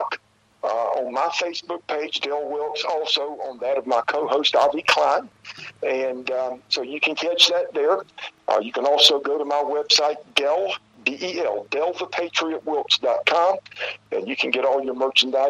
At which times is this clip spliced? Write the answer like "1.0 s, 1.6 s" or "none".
none